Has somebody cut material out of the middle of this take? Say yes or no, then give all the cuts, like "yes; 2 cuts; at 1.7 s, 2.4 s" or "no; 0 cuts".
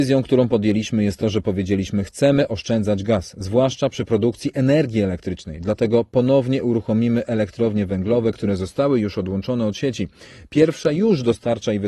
no; 0 cuts